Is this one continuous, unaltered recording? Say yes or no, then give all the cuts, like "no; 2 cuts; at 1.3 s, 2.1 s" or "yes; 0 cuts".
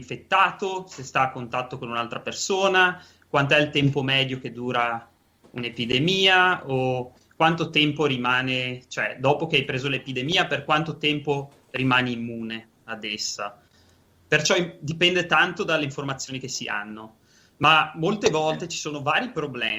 yes; 0 cuts